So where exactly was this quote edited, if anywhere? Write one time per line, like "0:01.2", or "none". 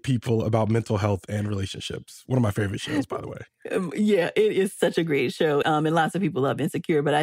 0:05.6